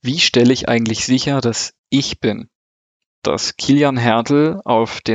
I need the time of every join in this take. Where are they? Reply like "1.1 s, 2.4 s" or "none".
1.8 s